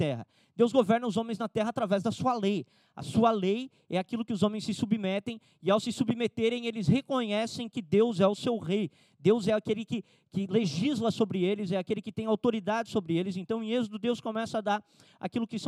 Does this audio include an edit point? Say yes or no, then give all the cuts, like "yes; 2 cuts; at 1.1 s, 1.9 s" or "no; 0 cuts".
no; 0 cuts